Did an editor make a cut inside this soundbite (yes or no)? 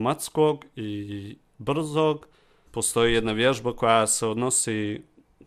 yes